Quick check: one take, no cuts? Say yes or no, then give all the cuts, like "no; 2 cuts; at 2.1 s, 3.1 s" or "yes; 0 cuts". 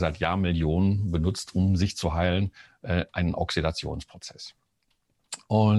yes; 0 cuts